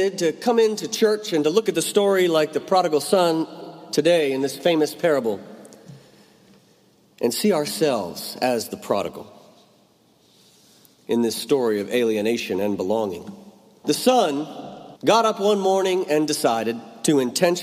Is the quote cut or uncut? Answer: cut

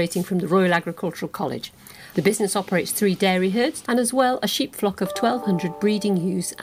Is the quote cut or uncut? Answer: cut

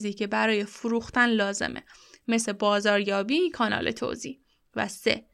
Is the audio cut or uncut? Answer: uncut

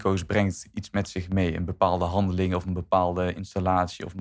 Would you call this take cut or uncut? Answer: uncut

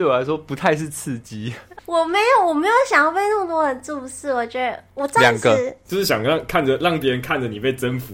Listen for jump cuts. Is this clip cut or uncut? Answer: cut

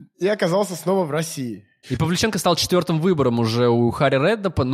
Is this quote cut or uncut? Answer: cut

